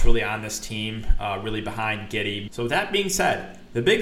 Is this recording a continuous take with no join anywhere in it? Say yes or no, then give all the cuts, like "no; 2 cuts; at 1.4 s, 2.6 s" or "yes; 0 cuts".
no; 1 cut; at 2.5 s